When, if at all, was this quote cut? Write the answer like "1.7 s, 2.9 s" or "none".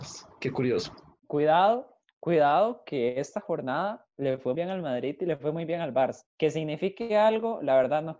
4.5 s